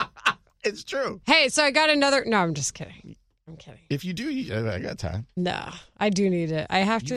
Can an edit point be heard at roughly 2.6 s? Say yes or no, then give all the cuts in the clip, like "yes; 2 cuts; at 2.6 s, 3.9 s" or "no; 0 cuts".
no; 0 cuts